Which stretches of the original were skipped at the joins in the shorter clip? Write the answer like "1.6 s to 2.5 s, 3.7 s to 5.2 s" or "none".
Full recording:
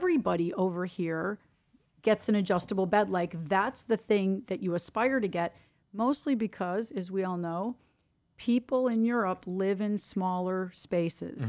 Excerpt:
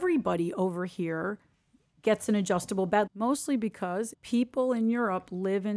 3.1 s to 5.8 s, 6.9 s to 8.3 s

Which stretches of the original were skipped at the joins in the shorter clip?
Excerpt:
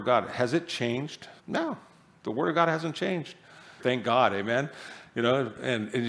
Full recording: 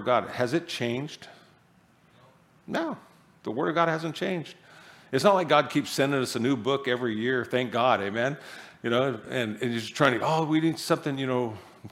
1.4 s to 2.6 s, 5.0 s to 7.5 s

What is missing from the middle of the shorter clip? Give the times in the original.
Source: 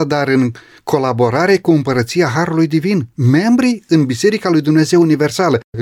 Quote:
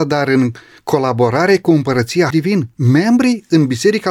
2.3 s to 2.7 s

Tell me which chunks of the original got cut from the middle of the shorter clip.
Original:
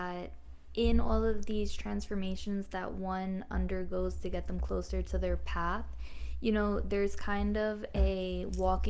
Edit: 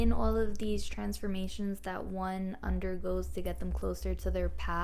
none

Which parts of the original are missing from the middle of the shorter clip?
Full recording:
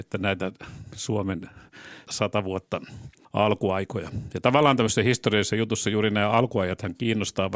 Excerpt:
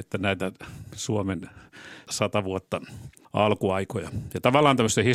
none

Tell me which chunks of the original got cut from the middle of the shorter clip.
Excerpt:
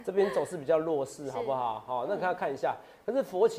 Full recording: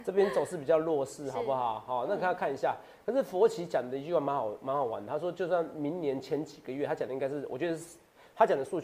none

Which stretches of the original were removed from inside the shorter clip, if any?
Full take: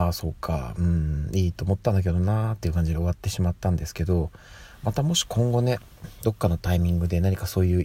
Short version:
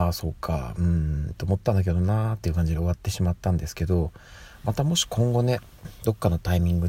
1.3 s to 1.5 s

